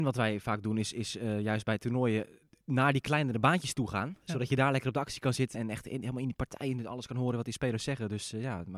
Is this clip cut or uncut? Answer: cut